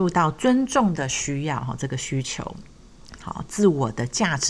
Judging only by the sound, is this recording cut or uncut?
cut